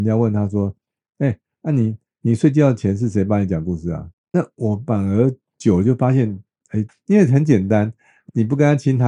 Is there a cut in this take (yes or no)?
yes